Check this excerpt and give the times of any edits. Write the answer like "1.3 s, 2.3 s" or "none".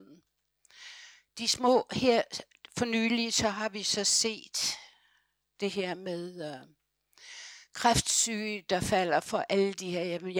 none